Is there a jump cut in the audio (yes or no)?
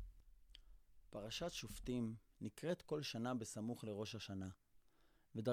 no